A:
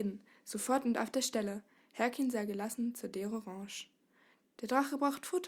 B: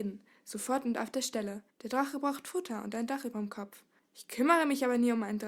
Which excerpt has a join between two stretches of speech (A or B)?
B